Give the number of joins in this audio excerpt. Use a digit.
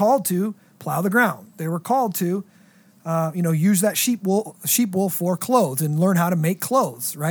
0